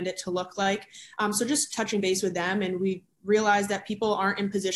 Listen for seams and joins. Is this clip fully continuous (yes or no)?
yes